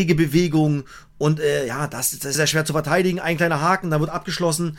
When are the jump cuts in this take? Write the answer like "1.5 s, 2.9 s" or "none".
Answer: 2.4 s